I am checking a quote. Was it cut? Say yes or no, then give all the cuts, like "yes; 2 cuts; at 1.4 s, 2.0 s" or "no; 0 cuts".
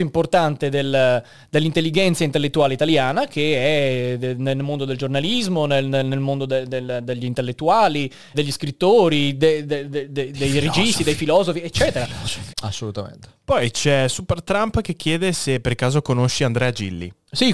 yes; 2 cuts; at 8.3 s, 12.5 s